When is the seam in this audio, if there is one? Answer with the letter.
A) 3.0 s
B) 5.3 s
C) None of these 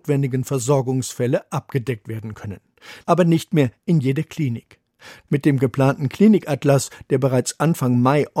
B